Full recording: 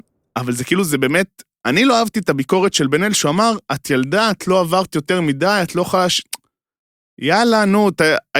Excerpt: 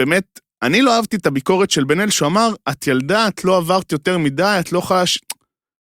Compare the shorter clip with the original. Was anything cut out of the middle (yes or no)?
no